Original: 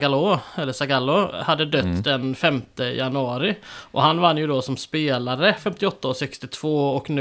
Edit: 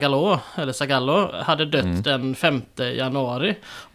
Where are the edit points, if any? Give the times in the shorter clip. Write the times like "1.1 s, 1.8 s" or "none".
none